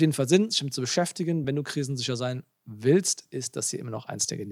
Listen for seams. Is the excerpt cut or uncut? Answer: uncut